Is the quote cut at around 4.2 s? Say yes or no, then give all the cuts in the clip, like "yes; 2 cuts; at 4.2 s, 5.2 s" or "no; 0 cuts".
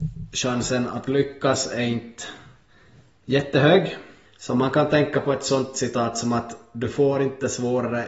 yes; 1 cut; at 4.2 s